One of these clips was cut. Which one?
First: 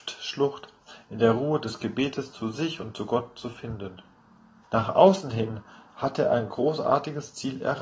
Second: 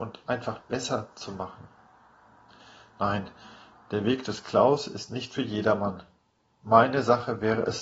first; 1 cut; at 4.6 s

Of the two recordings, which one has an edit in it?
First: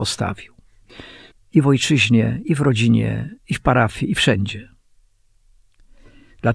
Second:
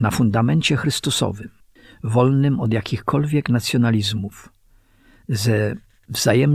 first; 1 cut; at 1.3 s

